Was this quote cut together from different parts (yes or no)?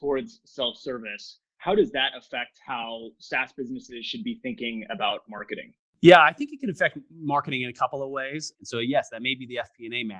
yes